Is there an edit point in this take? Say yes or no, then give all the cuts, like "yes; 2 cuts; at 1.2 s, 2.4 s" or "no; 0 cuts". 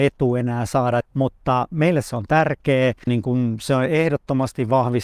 yes; 2 cuts; at 1.0 s, 3.1 s